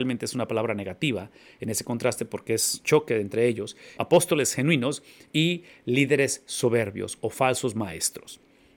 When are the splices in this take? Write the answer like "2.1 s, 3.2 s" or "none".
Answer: 4.0 s

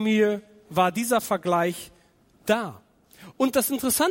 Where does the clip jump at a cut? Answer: none

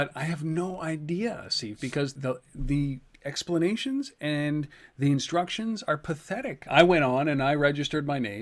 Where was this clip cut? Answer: 2.2 s, 6.7 s

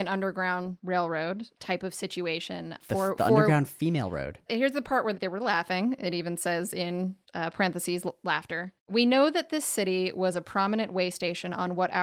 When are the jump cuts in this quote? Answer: none

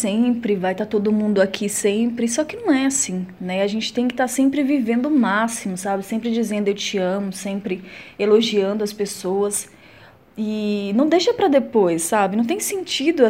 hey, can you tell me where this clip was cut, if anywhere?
none

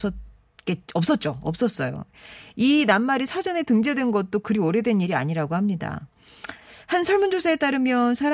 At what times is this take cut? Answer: none

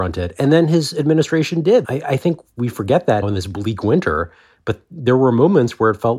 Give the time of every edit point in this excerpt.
1.8 s, 3.2 s

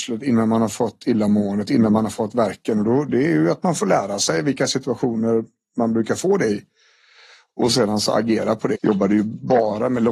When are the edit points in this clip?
8.7 s

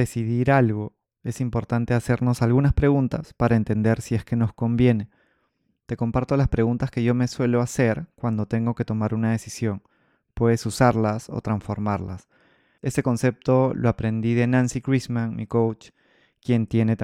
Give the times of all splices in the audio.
12.8 s

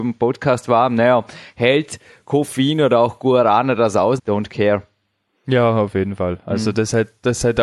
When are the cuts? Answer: 4.2 s

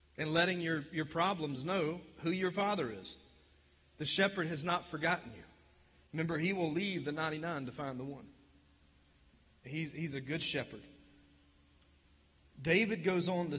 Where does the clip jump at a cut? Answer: none

